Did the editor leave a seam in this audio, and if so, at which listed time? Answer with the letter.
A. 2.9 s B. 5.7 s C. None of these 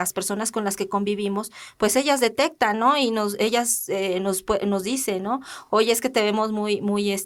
C